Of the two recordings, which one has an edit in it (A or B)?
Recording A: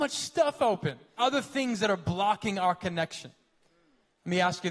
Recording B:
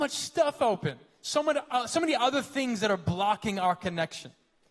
A